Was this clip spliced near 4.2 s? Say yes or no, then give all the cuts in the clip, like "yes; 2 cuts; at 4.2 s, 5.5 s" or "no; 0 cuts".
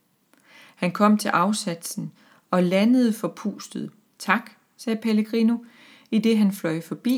yes; 1 cut; at 4.2 s